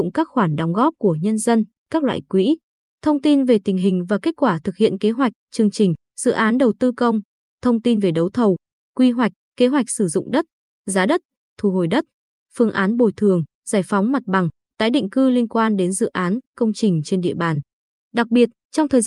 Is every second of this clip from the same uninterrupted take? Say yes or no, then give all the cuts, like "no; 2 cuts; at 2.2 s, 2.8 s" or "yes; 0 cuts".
no; 1 cut; at 17.9 s